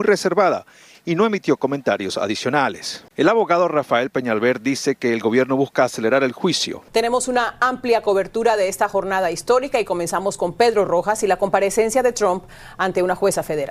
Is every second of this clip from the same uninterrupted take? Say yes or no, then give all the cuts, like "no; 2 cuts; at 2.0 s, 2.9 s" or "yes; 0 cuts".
no; 2 cuts; at 3.1 s, 6.9 s